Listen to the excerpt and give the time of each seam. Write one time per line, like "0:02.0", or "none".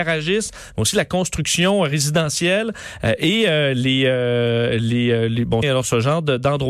0:05.6

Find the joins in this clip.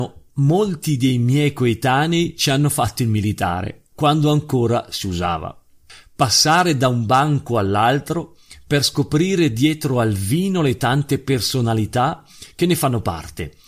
none

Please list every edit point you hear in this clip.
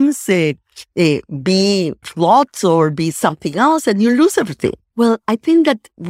0:02.0
0:04.9

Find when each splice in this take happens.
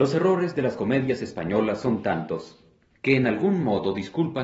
none

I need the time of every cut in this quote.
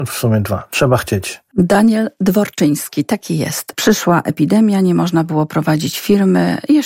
0:03.7

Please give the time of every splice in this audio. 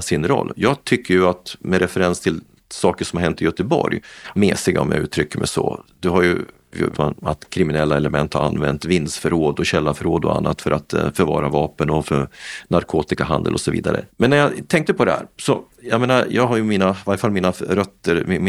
0:04.3
0:06.9
0:14.1

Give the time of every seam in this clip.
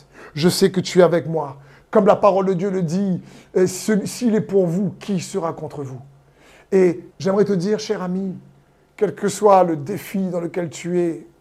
0:01.8
0:07.1

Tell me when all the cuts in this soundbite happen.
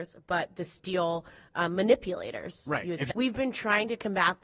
0:03.1

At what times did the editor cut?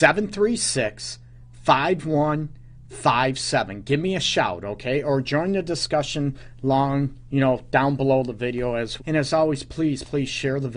0:09.0

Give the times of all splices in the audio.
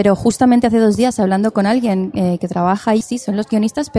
0:03.0

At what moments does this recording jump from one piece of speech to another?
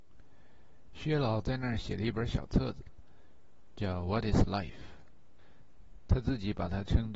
none

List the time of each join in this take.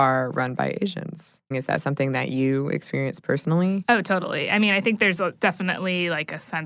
0:01.5

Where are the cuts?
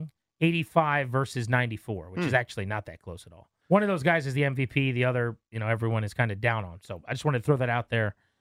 0:03.6

